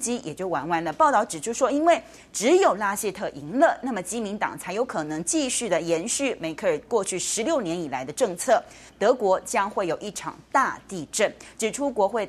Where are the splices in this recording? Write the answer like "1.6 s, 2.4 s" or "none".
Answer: 8.9 s